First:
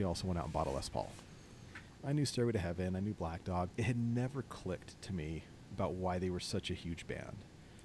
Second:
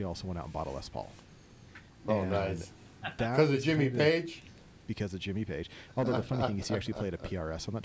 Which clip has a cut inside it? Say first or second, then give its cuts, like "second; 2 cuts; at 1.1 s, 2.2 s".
first; 2 cuts; at 2.0 s, 3.7 s